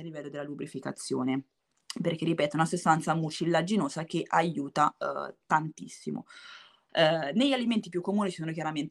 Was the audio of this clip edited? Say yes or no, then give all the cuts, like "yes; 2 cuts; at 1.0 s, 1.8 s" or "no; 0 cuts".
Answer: yes; 1 cut; at 6.9 s